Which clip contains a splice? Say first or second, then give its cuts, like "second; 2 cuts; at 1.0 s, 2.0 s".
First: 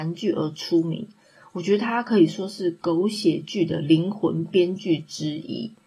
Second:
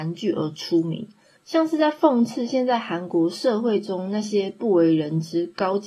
second; 1 cut; at 1.4 s